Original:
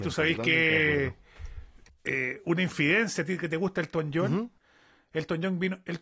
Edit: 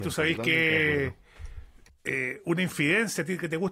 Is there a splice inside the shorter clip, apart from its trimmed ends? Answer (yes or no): no